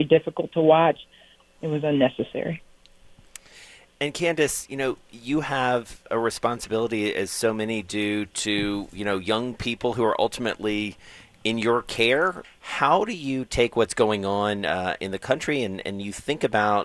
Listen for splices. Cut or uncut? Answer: cut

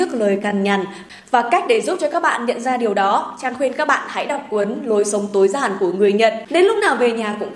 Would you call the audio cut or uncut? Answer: cut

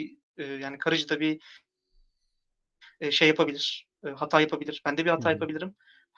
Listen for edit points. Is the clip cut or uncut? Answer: uncut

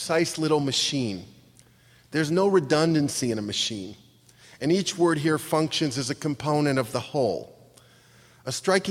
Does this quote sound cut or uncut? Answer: uncut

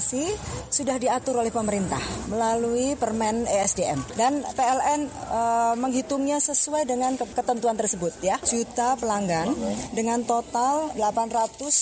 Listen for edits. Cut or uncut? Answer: cut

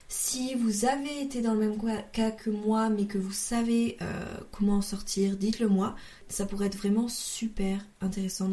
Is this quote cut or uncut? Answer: uncut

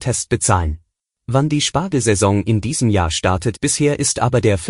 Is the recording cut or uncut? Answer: cut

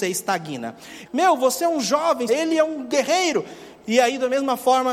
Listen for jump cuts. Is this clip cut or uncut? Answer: cut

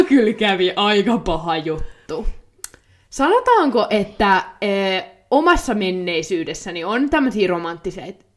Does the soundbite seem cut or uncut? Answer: uncut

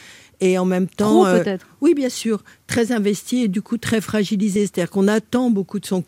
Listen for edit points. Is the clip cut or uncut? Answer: uncut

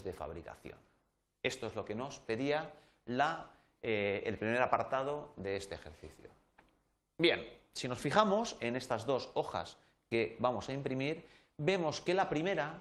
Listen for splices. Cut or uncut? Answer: uncut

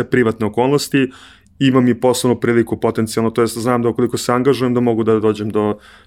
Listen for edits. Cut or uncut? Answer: uncut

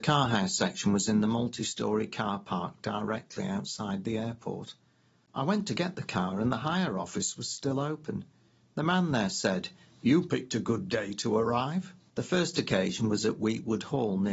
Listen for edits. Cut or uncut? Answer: cut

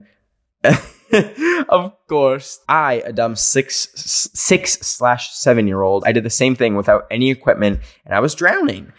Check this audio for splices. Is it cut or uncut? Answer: cut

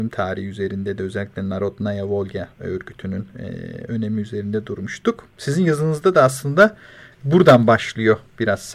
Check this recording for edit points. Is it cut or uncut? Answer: cut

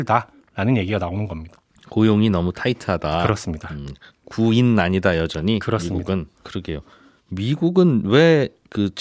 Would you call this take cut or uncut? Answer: cut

